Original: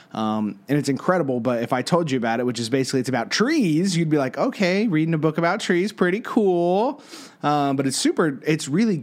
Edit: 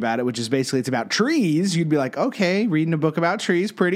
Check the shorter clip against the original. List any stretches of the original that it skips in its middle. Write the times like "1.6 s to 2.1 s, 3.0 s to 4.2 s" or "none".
none